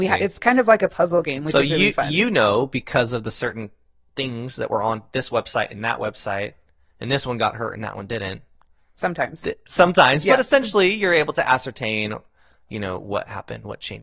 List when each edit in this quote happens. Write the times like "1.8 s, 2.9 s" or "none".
none